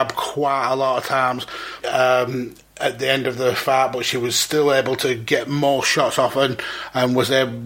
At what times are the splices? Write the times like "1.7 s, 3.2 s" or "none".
1.8 s